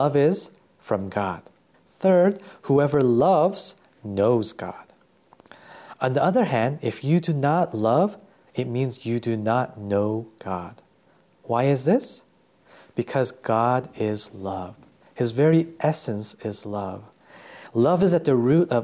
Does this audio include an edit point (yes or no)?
yes